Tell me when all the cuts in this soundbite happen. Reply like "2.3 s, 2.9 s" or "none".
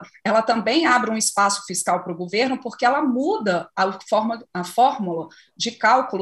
none

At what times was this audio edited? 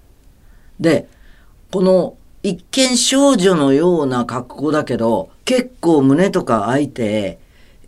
5.4 s, 6.9 s

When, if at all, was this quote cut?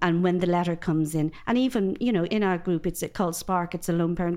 2.3 s

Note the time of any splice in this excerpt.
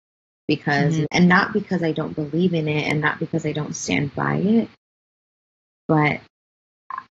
1.0 s

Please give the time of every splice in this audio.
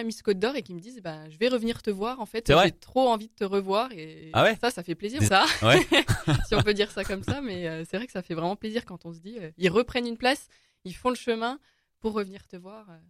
5.3 s

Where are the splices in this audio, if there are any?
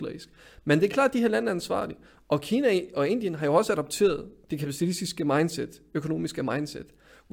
none

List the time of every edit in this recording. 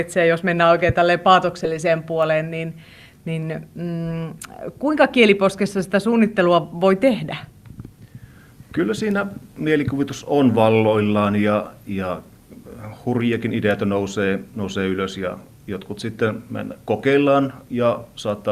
none

